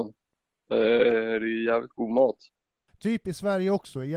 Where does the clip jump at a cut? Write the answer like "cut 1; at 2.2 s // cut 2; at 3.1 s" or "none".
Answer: cut 1; at 2.9 s

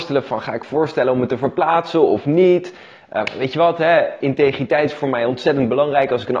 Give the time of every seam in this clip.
cut 1; at 3.2 s

